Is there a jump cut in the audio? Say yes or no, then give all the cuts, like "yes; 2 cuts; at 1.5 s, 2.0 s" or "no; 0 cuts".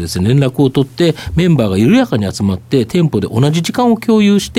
no; 0 cuts